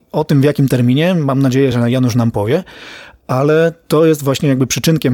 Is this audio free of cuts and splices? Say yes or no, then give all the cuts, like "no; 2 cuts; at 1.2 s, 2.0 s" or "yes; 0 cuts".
yes; 0 cuts